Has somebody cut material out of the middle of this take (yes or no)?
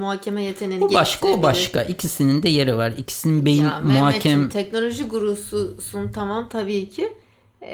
no